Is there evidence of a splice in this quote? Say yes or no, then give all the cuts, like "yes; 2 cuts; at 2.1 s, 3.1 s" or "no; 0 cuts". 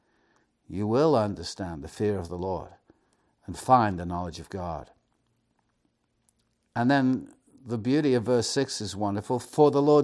no; 0 cuts